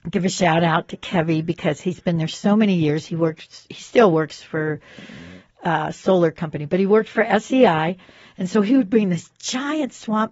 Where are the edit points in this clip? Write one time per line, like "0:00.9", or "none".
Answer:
none